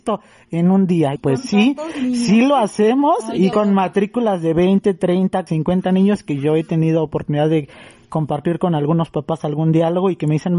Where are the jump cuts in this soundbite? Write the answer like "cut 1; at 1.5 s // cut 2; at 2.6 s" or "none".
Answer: cut 1; at 1.2 s // cut 2; at 3.5 s // cut 3; at 5.5 s